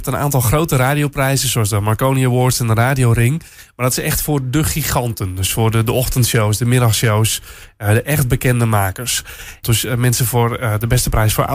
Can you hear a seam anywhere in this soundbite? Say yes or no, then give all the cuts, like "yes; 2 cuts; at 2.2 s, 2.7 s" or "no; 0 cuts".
yes; 1 cut; at 9.6 s